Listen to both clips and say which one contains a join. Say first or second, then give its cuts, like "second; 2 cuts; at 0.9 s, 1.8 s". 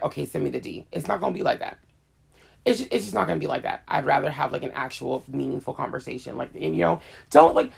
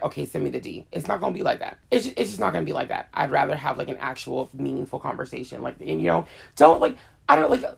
second; 1 cut; at 1.8 s